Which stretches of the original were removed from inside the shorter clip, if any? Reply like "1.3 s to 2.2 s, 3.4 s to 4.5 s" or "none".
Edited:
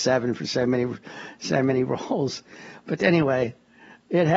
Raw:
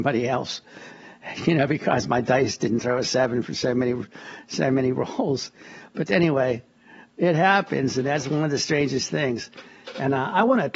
none